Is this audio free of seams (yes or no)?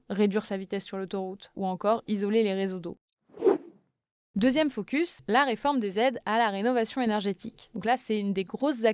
no